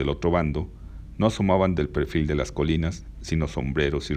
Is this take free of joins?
yes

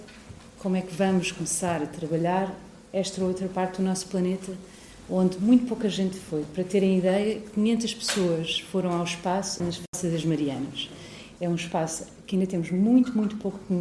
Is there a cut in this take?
yes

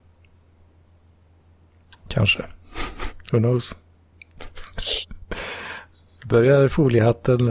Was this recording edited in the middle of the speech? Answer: no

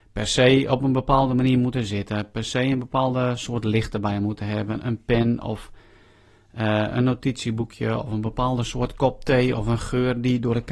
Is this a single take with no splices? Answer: yes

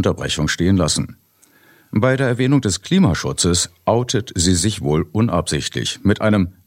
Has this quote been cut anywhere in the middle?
no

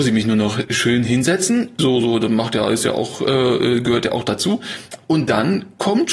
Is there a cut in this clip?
yes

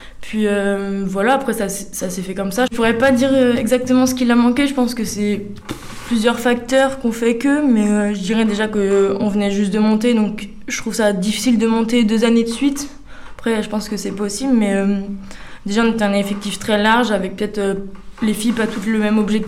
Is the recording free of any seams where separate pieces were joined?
no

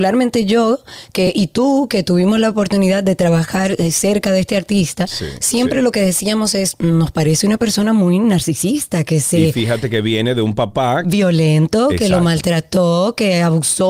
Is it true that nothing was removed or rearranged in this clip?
yes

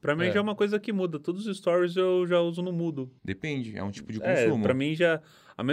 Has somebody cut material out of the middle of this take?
yes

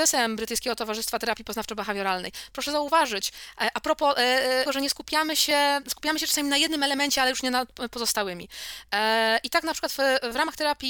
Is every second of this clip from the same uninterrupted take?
no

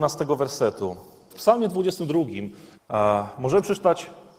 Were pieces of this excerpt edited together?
yes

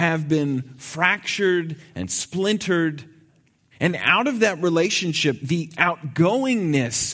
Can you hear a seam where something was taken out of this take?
yes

